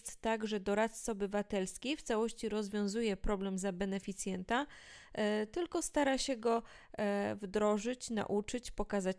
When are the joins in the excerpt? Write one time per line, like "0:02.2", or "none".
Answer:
none